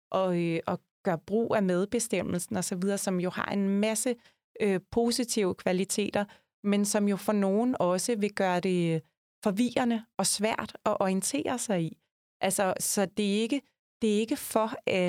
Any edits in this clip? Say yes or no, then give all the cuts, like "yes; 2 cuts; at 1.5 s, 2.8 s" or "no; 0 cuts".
no; 0 cuts